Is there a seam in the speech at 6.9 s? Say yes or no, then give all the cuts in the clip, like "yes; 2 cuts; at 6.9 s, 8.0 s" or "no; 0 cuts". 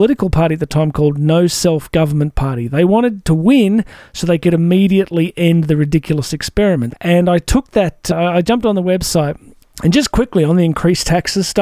yes; 2 cuts; at 6.9 s, 9.6 s